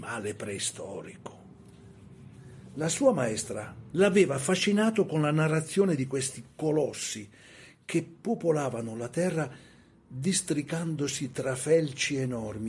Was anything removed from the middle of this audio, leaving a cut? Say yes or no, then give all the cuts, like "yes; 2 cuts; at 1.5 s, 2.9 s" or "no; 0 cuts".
yes; 1 cut; at 3.9 s